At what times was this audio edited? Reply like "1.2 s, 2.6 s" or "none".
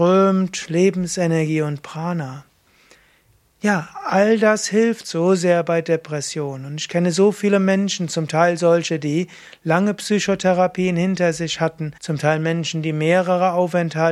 12.0 s